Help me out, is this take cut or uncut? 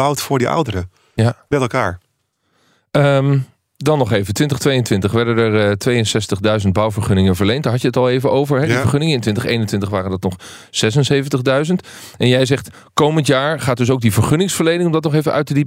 uncut